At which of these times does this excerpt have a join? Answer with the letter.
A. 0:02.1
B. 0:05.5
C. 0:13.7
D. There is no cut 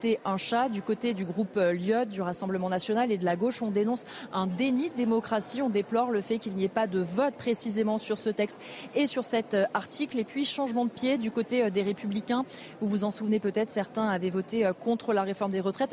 D